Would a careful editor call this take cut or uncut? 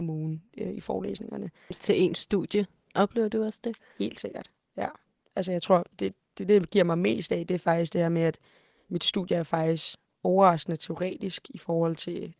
cut